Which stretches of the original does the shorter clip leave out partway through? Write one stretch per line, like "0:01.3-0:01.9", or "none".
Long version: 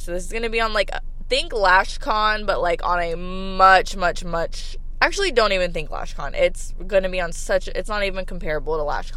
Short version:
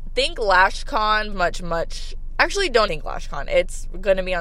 0:02.5-0:03.9
0:05.5-0:05.7